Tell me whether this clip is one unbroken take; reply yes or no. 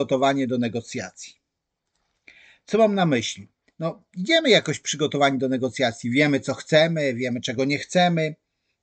yes